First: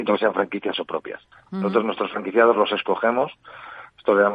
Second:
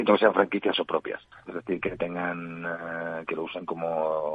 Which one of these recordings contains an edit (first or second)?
second